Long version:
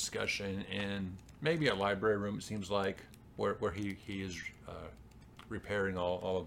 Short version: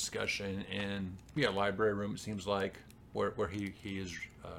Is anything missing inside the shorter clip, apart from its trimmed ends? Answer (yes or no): yes